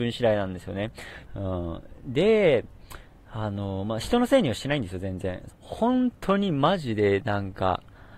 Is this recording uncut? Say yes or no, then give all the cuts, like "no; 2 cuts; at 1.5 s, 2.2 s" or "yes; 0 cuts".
no; 2 cuts; at 1.3 s, 5.5 s